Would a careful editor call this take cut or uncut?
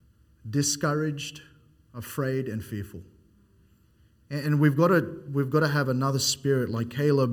uncut